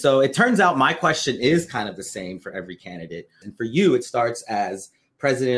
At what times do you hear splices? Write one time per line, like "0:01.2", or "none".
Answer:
0:03.4